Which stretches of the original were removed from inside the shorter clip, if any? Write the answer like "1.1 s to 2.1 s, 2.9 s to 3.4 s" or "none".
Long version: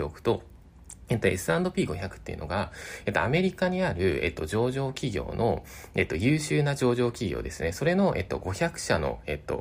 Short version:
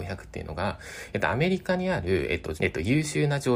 4.5 s to 5.9 s